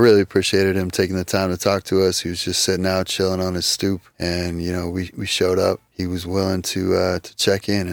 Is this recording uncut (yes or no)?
yes